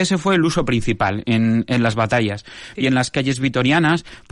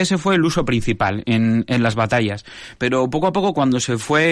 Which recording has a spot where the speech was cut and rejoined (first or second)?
first